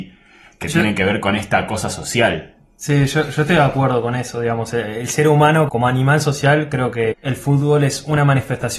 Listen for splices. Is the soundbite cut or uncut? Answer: cut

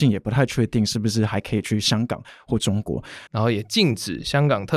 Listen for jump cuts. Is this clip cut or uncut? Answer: cut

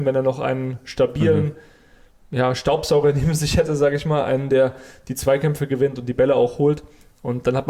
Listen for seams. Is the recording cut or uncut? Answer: uncut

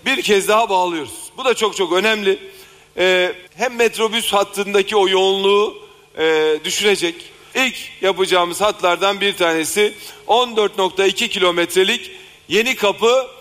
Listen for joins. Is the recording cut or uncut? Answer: cut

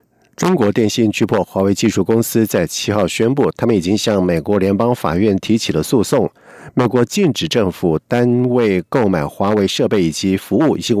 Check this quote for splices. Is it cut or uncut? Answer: uncut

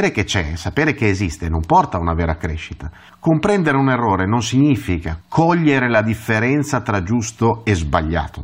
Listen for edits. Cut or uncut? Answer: cut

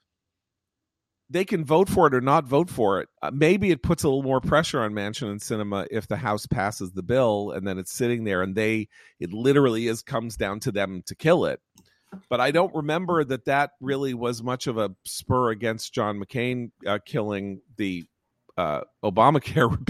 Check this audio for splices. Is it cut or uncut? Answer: cut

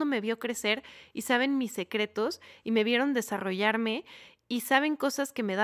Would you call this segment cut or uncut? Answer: uncut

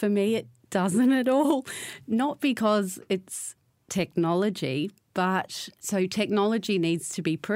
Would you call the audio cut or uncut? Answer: uncut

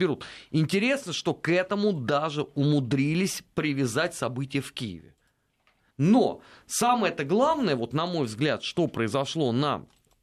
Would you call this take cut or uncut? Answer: cut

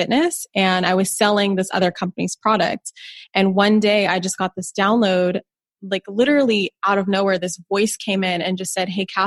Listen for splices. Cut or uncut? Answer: uncut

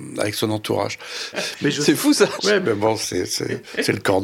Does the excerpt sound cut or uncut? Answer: cut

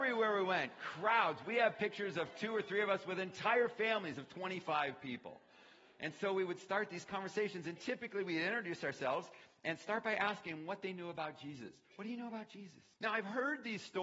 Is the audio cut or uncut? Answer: cut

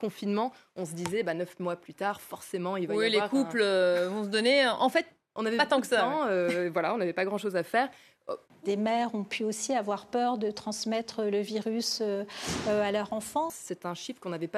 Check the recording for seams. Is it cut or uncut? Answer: cut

